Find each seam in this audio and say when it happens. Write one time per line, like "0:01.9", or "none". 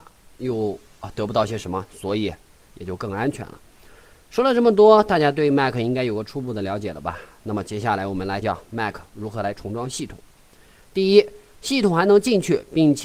0:08.4
0:10.9